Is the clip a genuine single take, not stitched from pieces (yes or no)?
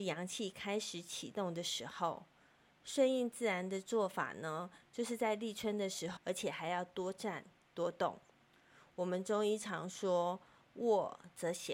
no